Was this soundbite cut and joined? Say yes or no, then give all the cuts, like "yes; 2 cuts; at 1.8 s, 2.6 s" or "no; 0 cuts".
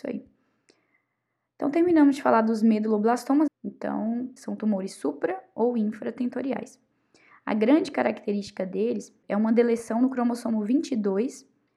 yes; 1 cut; at 3.5 s